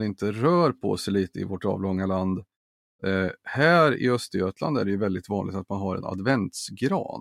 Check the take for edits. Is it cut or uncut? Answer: uncut